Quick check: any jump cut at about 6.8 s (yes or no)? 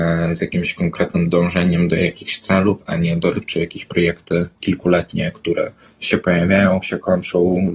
no